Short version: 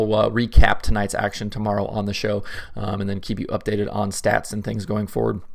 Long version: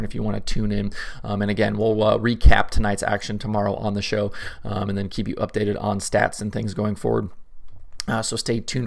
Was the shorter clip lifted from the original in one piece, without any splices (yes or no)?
yes